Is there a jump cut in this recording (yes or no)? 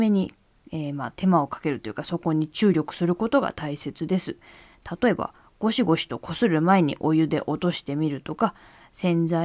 no